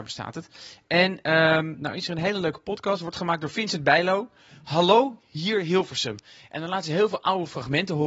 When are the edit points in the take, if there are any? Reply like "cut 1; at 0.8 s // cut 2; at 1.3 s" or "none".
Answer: none